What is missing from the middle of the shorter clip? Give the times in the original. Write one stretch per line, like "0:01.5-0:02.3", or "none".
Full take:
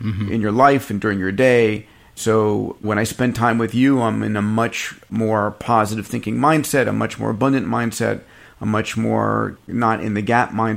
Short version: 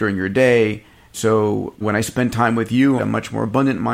0:04.0-0:06.8